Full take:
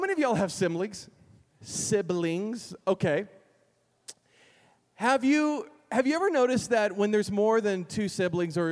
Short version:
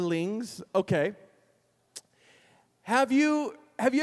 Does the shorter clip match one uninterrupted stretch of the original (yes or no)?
yes